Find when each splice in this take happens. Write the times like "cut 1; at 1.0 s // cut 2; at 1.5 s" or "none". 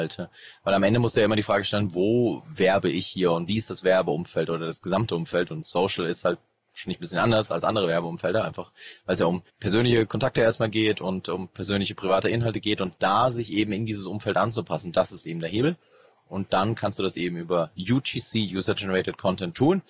cut 1; at 9.5 s